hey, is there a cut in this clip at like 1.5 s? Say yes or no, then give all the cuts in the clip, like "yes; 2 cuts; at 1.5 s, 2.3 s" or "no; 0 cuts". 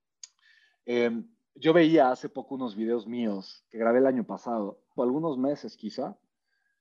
no; 1 cut; at 5.0 s